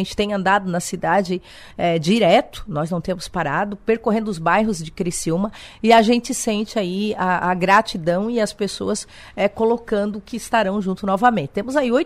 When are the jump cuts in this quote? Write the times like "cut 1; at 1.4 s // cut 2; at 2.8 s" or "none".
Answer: none